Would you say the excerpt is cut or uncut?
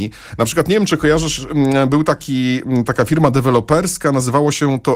uncut